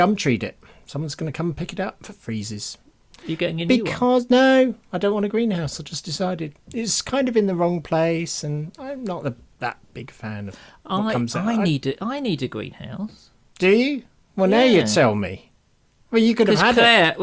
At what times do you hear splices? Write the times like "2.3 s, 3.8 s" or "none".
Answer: none